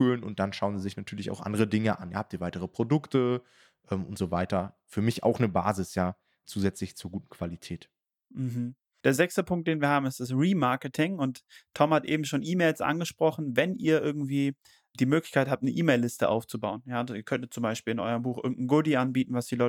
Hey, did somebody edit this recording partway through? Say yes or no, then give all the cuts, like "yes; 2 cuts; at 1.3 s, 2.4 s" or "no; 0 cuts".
no; 0 cuts